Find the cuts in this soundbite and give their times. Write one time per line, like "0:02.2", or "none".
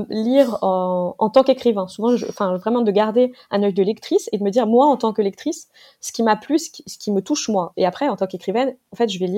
none